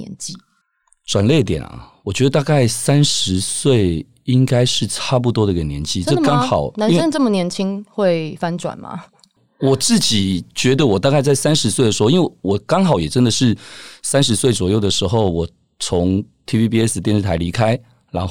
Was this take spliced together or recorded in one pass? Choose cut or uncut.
uncut